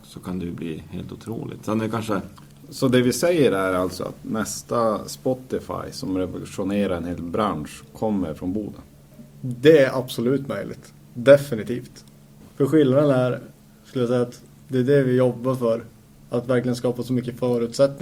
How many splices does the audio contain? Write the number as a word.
two